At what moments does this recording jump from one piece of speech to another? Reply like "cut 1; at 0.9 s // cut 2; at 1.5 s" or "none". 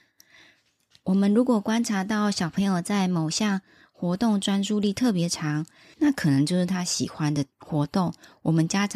cut 1; at 5.9 s // cut 2; at 7.5 s